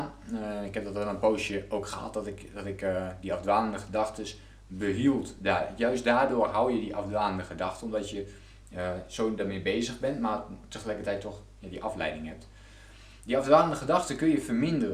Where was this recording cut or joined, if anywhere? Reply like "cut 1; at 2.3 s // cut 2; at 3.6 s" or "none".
none